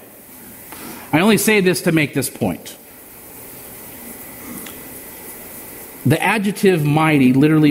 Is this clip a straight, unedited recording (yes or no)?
yes